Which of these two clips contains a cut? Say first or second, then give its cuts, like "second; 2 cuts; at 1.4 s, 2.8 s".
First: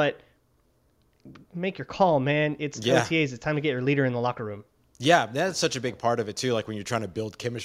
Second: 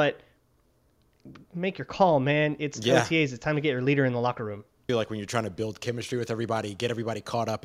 second; 1 cut; at 4.9 s